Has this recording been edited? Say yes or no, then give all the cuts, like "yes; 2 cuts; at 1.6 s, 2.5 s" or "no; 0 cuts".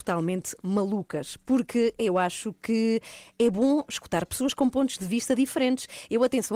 no; 0 cuts